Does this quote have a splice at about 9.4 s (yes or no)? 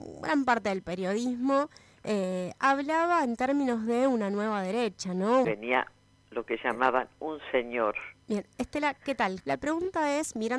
yes